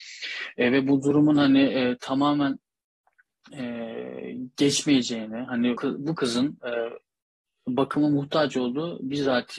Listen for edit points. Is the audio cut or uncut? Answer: cut